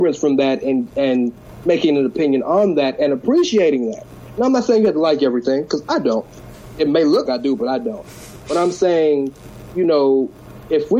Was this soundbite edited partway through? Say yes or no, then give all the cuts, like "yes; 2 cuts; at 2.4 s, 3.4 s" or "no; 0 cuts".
yes; 1 cut; at 7.2 s